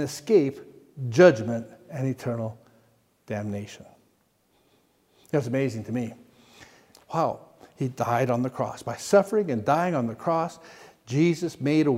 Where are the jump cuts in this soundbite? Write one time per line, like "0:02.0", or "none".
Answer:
0:06.9